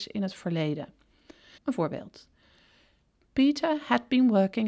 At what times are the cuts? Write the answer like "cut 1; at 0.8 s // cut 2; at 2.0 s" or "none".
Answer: cut 1; at 1.6 s